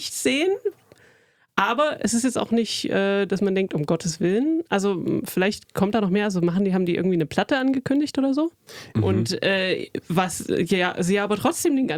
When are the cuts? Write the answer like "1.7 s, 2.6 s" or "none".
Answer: 8.9 s